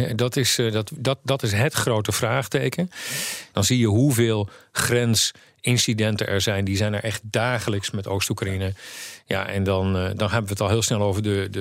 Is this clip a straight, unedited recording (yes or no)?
no